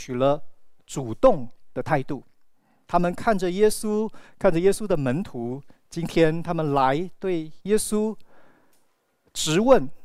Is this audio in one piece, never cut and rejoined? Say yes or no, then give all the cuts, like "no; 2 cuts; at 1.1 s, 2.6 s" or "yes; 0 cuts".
yes; 0 cuts